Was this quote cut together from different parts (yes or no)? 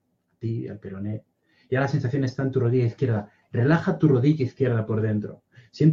no